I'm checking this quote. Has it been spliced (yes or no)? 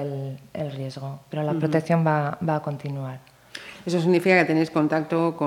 no